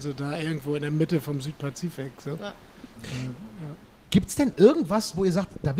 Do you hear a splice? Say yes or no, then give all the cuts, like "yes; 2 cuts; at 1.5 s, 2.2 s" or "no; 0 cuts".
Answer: yes; 1 cut; at 2.9 s